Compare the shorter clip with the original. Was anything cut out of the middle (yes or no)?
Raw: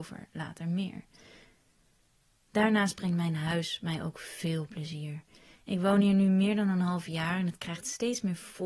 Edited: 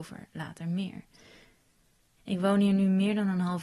yes